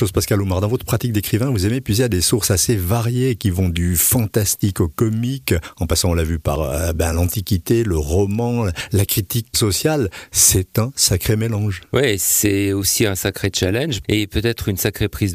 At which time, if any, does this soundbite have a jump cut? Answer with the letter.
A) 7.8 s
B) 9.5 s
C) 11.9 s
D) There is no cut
B